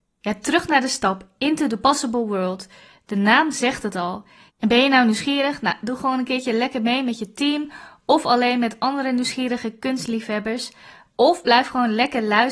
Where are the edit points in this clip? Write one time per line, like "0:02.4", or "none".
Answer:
0:04.5